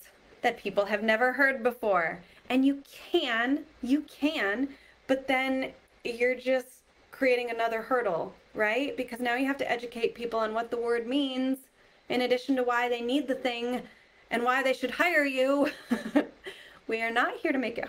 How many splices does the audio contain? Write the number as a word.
zero